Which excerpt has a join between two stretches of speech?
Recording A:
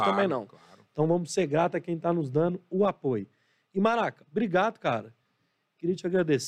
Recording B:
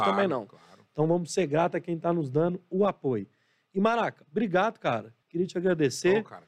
B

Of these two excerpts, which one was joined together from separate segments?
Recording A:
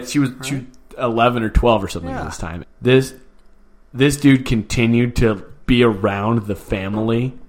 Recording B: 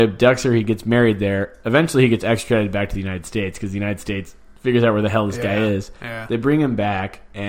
A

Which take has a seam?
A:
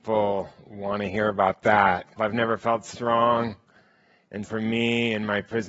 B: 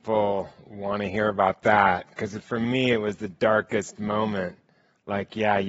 A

